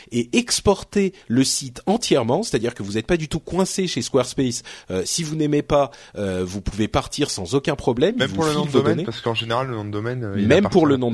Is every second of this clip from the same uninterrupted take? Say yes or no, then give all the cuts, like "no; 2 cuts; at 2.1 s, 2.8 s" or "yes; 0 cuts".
yes; 0 cuts